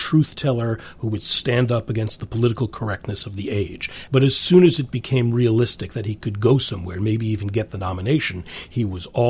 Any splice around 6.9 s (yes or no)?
no